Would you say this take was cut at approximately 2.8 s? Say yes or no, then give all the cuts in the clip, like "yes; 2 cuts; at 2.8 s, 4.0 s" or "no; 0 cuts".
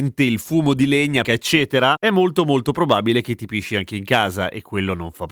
no; 1 cut; at 1.2 s